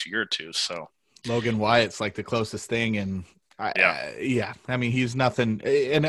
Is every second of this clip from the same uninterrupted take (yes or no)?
yes